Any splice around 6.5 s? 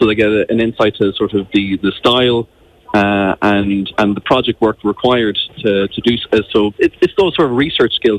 no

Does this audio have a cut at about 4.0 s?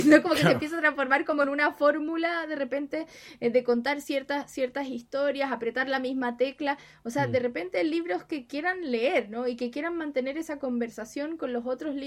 no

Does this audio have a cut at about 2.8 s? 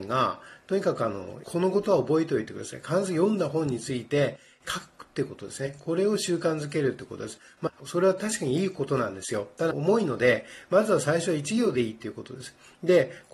no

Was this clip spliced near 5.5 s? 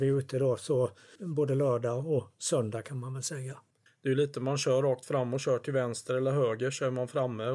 no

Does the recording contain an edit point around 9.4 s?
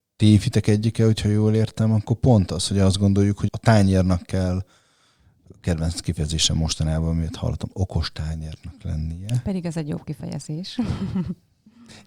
no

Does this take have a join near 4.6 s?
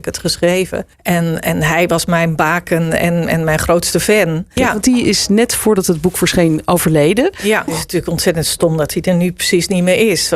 yes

